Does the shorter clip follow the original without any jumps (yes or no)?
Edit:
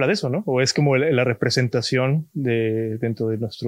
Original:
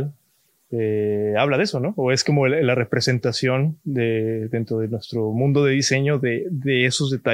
yes